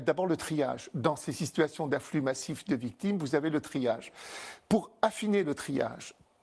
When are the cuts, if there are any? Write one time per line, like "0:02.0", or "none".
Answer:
none